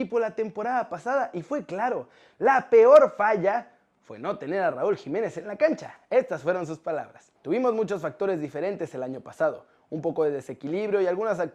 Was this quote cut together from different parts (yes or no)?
yes